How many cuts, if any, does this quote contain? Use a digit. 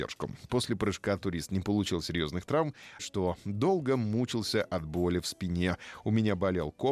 1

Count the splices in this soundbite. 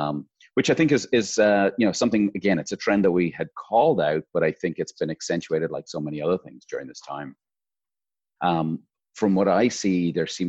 1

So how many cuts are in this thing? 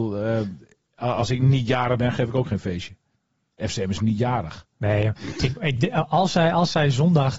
0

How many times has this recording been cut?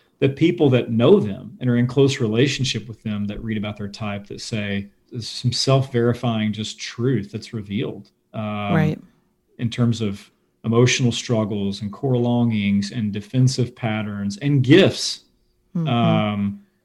1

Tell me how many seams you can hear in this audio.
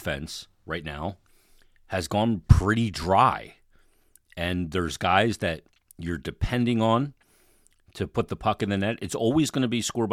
0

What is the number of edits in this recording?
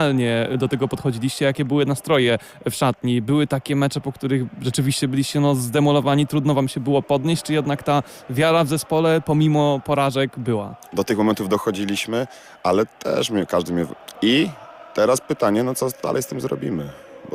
2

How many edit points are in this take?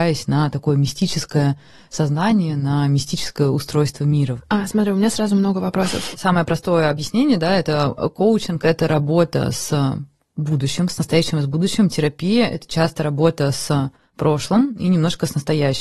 2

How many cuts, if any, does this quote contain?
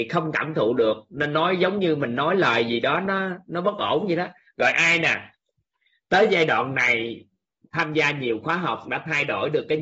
0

